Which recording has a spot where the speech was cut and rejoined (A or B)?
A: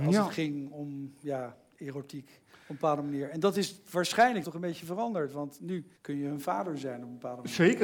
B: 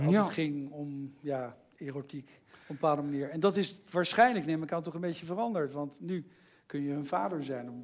A